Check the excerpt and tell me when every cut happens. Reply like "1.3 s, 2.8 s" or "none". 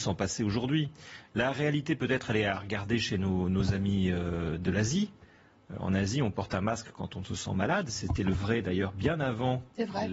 none